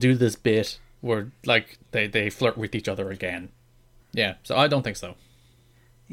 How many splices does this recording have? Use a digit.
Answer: 1